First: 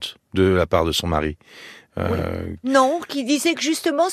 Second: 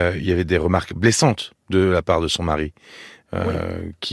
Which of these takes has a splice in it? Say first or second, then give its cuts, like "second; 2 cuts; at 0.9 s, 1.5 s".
first; 1 cut; at 2.6 s